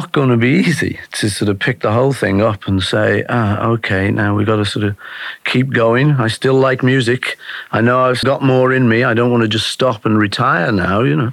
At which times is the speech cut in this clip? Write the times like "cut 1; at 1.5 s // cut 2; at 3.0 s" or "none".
cut 1; at 8.2 s